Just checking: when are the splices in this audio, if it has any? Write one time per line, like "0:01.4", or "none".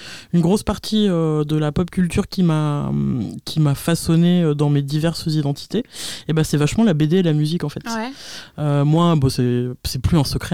none